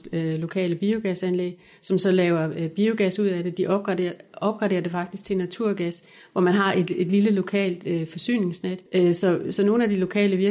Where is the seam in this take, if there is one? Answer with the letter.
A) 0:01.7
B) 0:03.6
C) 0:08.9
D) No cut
C